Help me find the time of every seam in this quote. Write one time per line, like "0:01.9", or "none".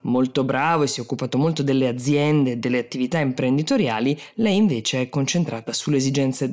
none